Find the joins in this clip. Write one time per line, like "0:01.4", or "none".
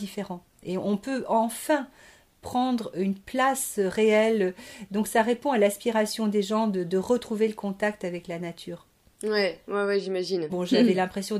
0:10.5

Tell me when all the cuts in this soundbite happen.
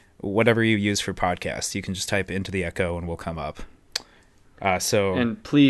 none

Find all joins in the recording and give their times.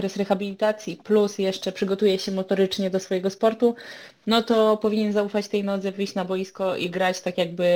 none

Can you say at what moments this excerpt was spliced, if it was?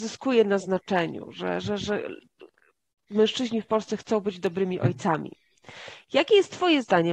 none

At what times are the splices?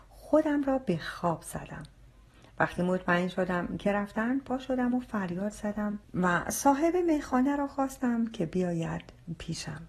0:06.0

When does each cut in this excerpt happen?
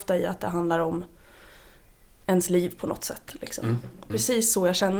0:04.1

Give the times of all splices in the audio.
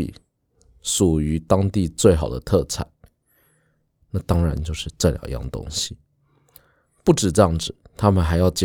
none

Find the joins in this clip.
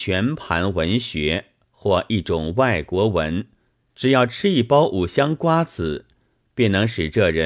0:03.9

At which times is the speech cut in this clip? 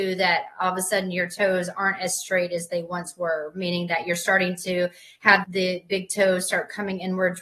0:05.4

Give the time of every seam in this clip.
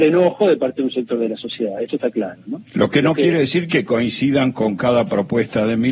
none

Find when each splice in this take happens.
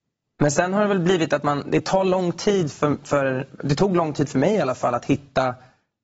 none

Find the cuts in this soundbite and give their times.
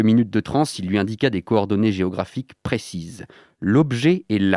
none

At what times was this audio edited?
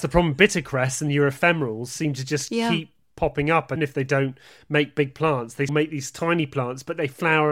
0:03.8
0:05.7

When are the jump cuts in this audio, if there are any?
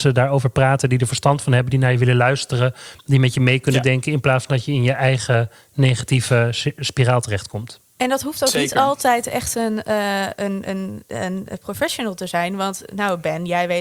none

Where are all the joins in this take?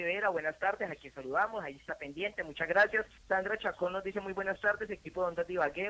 0:03.2

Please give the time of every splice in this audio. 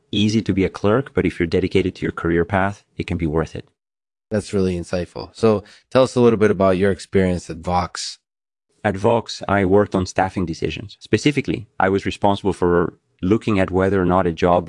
none

